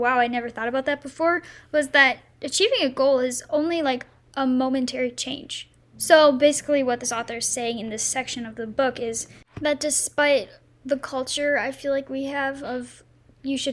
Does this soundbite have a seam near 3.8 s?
no; 1 cut; at 5.9 s

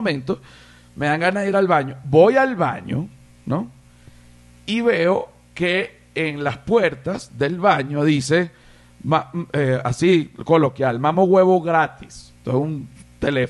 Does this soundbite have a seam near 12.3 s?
no; 0 cuts

